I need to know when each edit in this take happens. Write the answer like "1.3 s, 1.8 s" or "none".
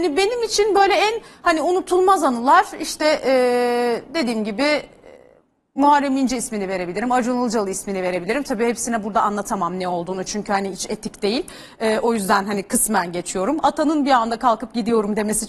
none